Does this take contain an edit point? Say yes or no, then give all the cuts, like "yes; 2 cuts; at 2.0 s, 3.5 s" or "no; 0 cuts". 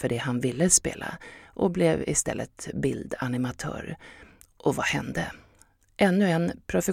yes; 1 cut; at 5.8 s